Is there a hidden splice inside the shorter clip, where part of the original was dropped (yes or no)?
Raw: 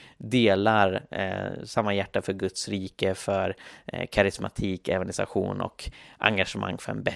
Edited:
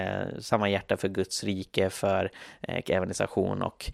yes